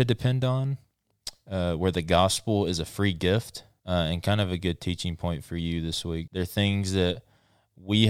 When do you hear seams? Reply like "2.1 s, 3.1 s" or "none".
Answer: 3.8 s, 6.3 s